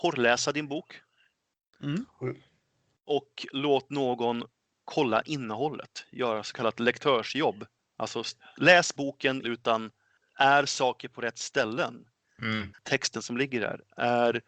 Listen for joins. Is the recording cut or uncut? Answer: cut